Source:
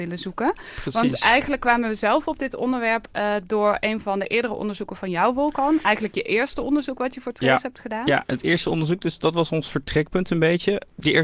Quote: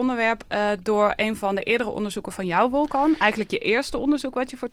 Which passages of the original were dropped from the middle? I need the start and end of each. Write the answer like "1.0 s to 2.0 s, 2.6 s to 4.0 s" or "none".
none

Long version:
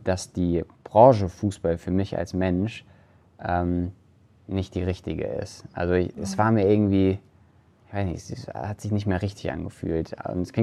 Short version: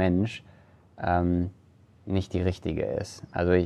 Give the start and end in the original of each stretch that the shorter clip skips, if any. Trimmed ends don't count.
none

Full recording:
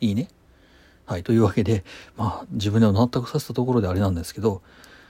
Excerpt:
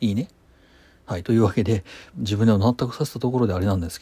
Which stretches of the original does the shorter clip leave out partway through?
2.1 s to 2.5 s

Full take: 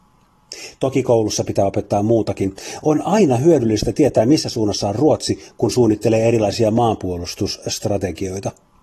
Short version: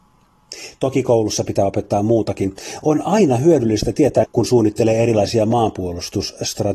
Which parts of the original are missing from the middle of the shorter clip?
4.2 s to 5.5 s

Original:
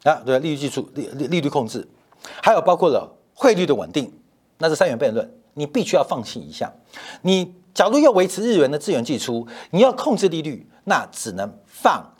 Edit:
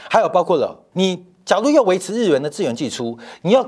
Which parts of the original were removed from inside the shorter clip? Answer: 3.2 s to 7.2 s

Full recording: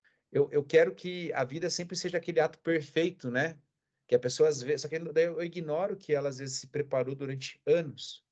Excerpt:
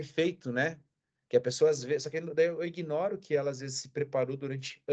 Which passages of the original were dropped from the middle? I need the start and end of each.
none

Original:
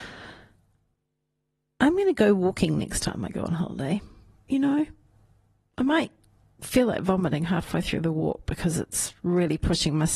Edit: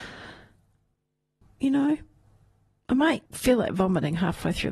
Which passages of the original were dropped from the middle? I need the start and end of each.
1.4 s to 4.3 s, 6.1 s to 6.5 s

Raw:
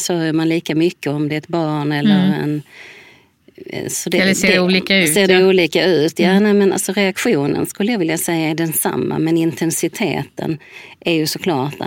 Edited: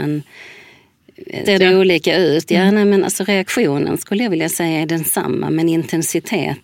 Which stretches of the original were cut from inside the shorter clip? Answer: 3.8 s to 5.1 s

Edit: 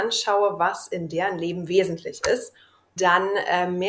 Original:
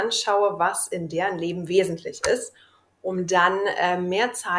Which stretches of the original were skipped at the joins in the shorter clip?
3.0 s to 3.3 s

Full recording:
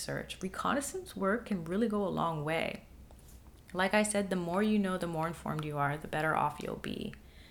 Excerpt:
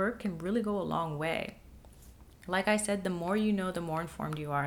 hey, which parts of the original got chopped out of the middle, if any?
none

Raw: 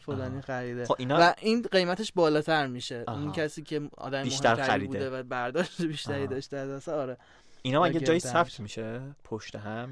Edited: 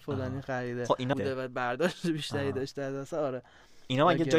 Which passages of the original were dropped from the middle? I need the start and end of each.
1.1 s to 4.9 s

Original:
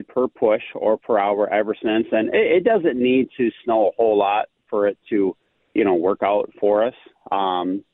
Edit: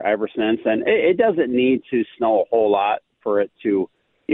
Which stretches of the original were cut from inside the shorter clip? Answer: none

